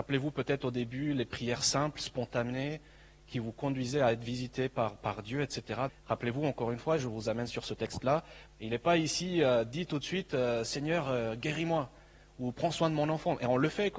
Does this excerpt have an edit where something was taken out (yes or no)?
yes